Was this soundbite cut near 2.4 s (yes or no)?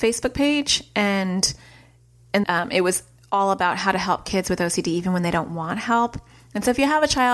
yes